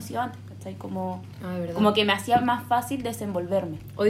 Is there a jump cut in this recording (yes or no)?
no